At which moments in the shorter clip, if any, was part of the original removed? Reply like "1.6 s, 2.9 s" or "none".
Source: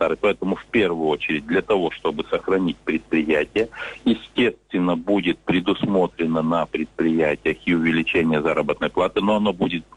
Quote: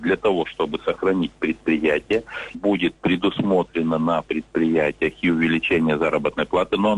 2.5 s